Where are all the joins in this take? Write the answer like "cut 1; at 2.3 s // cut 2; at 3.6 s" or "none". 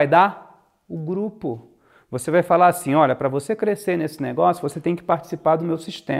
none